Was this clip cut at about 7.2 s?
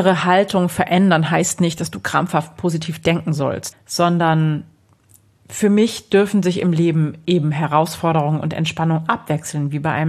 no; 1 cut; at 3.7 s

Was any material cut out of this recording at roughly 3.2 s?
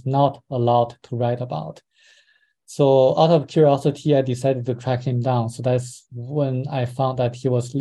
no; 0 cuts

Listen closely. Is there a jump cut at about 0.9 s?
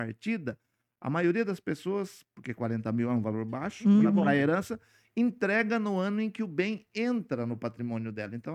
no; 0 cuts

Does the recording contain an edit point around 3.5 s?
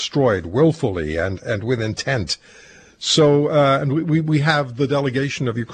no; 0 cuts

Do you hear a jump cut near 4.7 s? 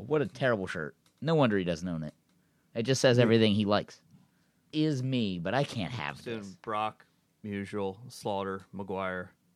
yes; 1 cut; at 4.7 s

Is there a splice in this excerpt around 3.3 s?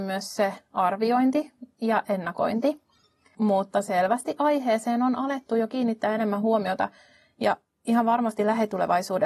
yes; 1 cut; at 3.3 s

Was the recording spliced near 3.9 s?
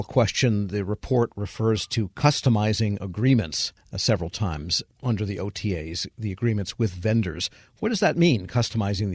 no; 0 cuts

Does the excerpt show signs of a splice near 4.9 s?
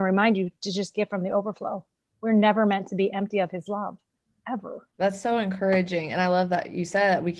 yes; 1 cut; at 4.9 s

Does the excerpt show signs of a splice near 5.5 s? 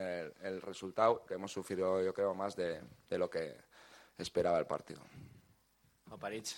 no; 1 cut; at 1.3 s

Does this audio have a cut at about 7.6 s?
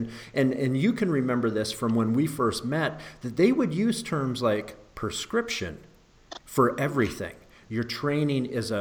yes; 1 cut; at 7.6 s

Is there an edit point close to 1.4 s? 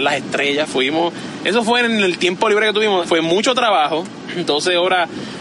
no; 1 cut; at 3.0 s

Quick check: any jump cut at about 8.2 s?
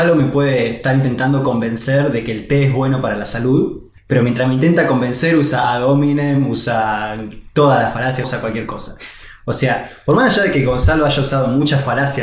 yes; 1 cut; at 8.2 s

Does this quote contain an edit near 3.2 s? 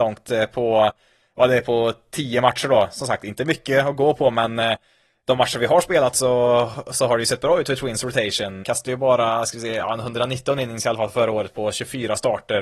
no; 1 cut; at 8.6 s

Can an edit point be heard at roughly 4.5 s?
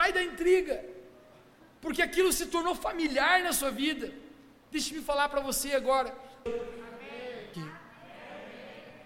no; 2 cuts; at 6.5 s, 7.5 s

